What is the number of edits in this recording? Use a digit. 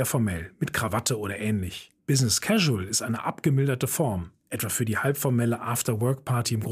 1